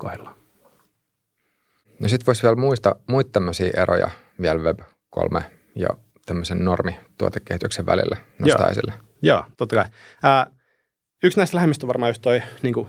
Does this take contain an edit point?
yes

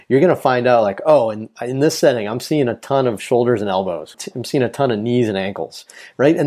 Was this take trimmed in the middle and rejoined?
yes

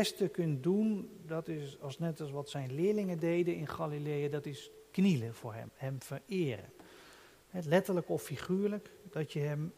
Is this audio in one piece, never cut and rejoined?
no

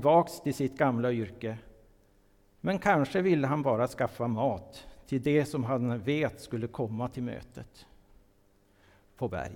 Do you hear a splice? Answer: no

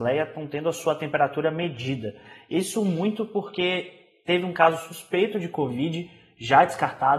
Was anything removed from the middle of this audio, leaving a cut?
no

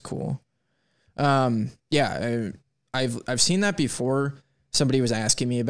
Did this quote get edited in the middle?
yes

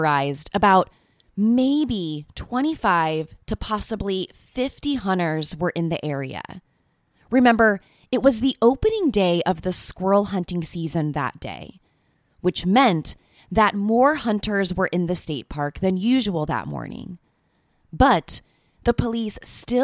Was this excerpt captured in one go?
yes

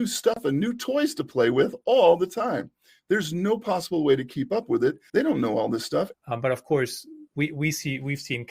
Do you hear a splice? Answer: yes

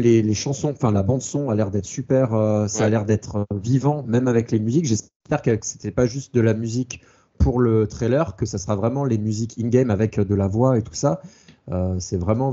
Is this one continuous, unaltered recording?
yes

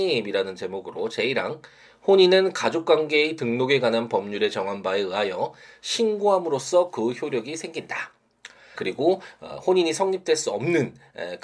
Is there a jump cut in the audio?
yes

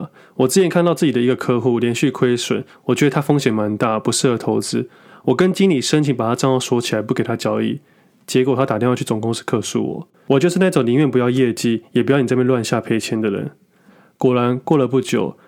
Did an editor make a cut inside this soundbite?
no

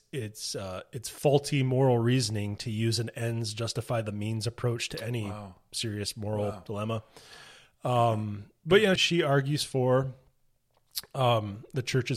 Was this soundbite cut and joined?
yes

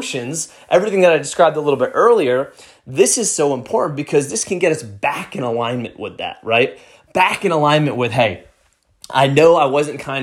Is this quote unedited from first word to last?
yes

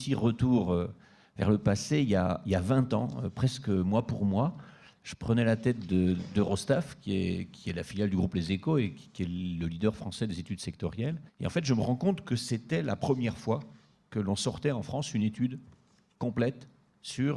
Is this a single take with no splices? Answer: no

